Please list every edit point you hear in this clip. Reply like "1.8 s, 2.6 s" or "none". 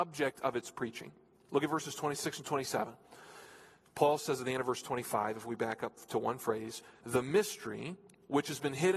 7.0 s